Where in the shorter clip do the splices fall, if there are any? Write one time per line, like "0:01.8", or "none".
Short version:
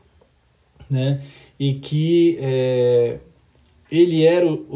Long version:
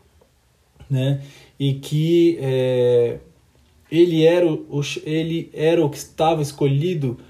none